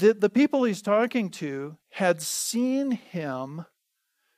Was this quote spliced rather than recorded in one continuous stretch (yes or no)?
no